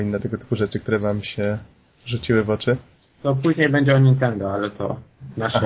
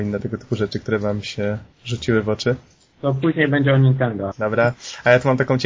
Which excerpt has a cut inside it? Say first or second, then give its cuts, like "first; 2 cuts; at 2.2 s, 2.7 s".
second; 2 cuts; at 1.7 s, 4.3 s